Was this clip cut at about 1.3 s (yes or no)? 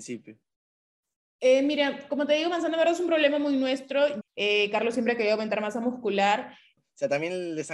no